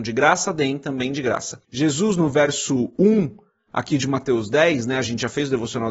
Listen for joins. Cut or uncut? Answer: cut